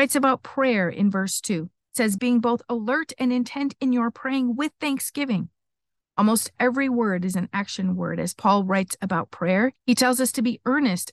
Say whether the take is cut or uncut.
cut